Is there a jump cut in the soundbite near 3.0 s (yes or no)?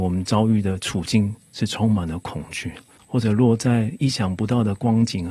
yes